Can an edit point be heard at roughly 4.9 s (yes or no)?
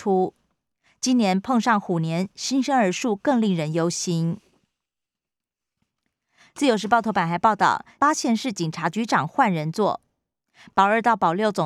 no